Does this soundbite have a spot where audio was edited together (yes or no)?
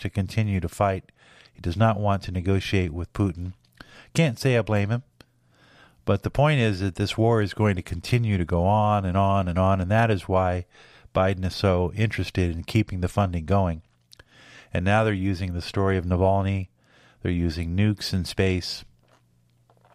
no